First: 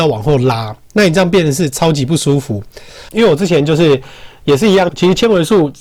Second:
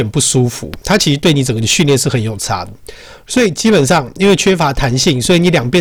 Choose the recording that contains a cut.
first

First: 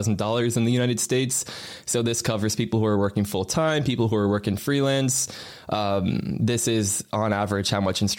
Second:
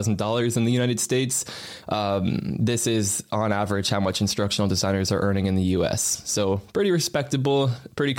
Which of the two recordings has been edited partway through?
second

